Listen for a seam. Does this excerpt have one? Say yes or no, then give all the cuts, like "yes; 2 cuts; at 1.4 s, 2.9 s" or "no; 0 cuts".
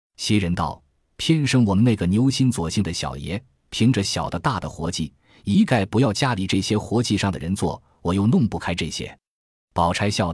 no; 0 cuts